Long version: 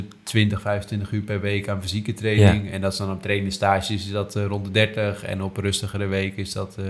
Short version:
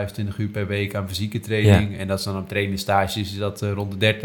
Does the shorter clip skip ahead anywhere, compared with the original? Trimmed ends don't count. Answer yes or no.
no